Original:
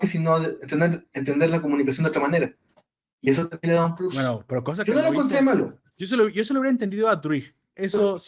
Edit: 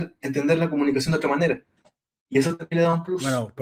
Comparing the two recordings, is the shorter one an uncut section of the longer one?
yes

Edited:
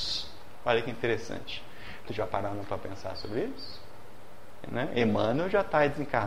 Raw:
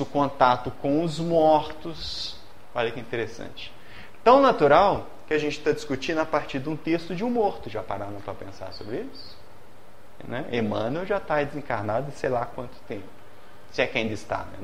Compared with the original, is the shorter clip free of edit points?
no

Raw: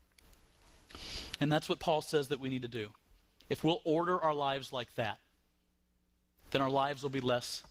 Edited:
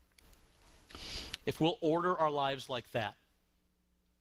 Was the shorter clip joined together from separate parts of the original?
yes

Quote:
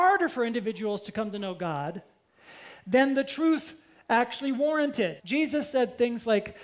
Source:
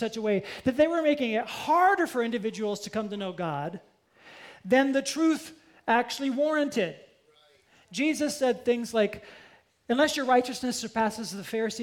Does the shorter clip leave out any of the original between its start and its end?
yes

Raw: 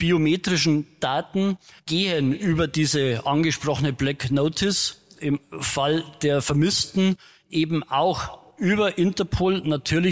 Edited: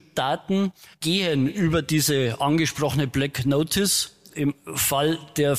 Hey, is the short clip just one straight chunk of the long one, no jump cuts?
yes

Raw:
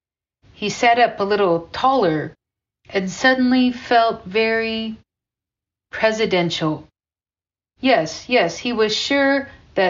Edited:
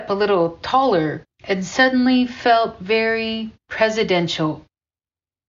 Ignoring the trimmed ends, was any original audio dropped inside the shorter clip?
yes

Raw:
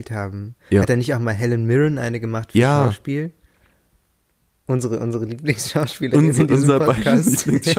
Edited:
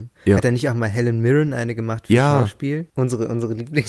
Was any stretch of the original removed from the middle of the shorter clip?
yes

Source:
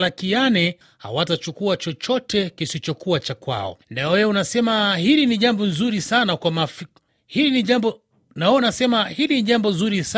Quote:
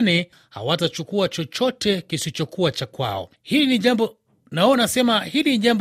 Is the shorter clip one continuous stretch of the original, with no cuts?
no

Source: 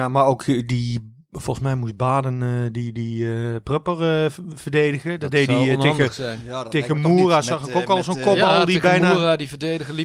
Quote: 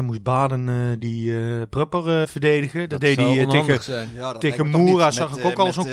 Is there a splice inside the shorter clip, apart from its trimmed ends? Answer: yes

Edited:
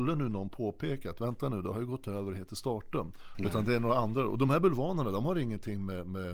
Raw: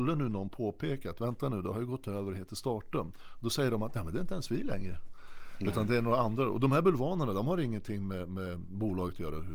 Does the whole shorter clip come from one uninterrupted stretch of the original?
no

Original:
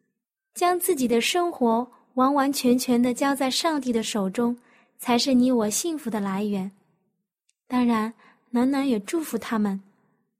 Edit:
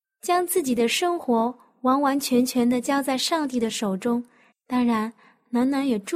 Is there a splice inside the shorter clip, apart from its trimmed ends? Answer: yes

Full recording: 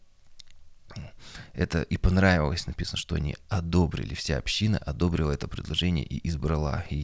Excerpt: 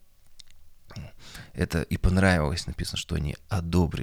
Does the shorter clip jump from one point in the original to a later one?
no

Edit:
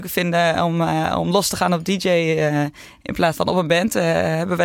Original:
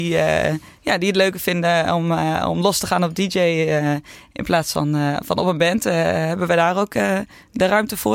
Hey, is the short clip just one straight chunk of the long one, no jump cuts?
no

